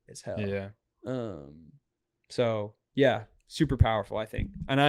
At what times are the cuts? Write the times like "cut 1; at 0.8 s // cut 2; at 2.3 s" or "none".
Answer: none